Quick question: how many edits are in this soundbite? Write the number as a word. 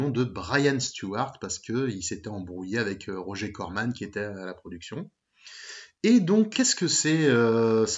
one